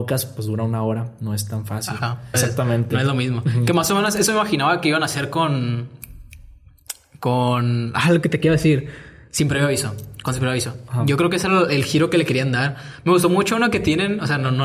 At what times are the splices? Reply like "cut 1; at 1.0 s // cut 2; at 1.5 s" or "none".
cut 1; at 2.3 s